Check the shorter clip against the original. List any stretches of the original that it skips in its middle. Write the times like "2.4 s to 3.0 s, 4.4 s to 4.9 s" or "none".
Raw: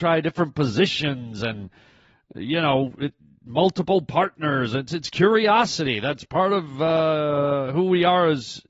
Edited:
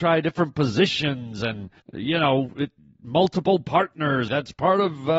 1.8 s to 2.2 s, 4.7 s to 6.0 s

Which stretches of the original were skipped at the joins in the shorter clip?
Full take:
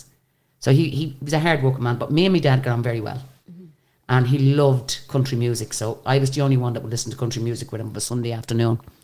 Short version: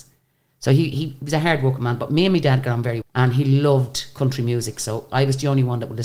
3.0 s to 4.0 s

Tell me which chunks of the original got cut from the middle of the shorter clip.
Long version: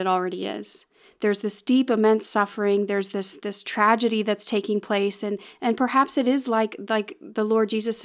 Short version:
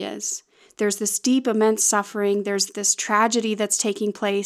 3.1 s to 3.4 s

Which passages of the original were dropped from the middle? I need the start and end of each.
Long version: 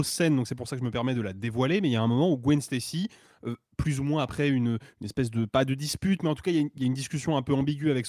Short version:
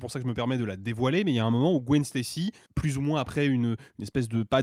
3.2 s to 3.7 s

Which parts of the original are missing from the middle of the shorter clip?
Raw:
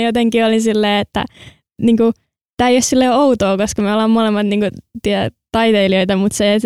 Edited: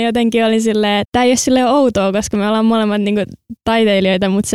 1.0 s to 2.5 s, 5.0 s to 5.4 s

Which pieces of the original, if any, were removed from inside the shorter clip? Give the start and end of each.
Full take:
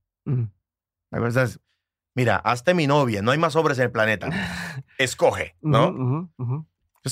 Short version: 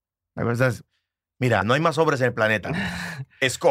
2.4 s to 3.2 s

